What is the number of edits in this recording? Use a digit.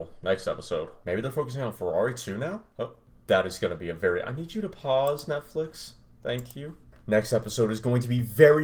1